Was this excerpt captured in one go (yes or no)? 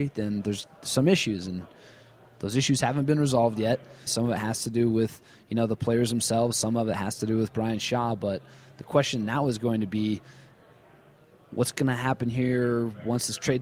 no